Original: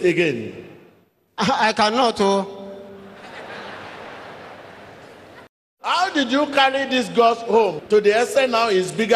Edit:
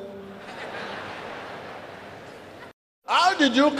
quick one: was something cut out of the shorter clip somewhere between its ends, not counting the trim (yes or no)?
no